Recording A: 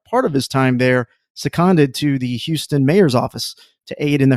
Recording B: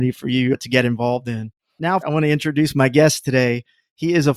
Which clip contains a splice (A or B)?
B